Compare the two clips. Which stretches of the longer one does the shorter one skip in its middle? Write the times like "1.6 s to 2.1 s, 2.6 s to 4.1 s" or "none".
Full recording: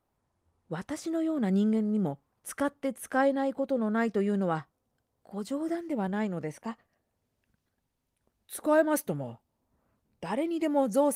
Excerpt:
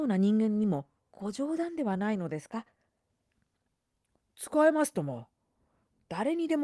2.3 s to 5.1 s